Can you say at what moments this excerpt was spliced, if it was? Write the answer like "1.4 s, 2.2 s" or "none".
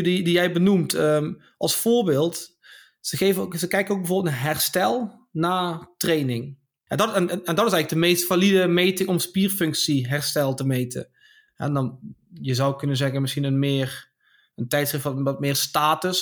6.9 s, 11.5 s